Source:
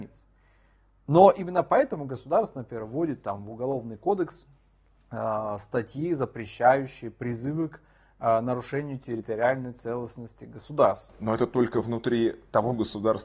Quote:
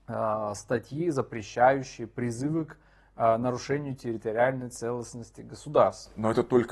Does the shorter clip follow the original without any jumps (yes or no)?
yes